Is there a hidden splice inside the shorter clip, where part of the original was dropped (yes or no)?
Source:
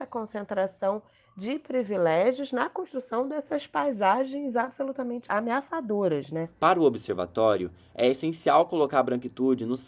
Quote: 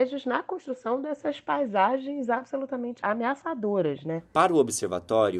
no